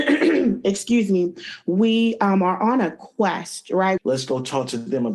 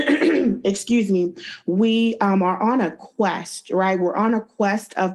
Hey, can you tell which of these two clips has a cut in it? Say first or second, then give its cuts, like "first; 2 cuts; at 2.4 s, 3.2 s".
first; 1 cut; at 4.0 s